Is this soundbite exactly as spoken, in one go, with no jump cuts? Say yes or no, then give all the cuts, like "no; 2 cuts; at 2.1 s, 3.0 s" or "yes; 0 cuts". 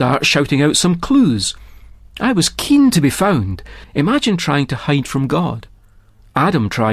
no; 1 cut; at 3.8 s